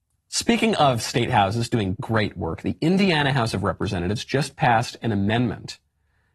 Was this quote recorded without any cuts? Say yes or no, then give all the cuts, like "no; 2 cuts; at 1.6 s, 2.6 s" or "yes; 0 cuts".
no; 1 cut; at 2.0 s